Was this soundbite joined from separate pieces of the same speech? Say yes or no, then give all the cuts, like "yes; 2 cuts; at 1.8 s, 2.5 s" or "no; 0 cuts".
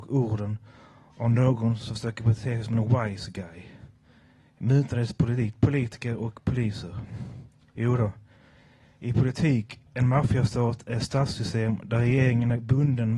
no; 0 cuts